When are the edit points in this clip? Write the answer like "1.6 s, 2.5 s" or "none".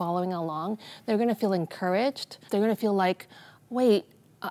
2.5 s